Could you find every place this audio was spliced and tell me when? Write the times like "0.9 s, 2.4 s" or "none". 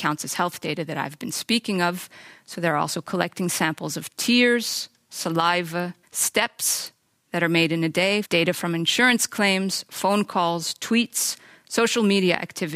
6.0 s, 8.2 s